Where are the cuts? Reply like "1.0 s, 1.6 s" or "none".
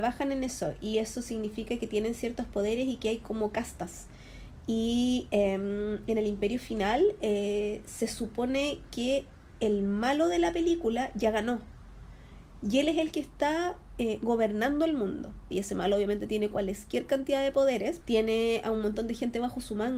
15.5 s, 18.0 s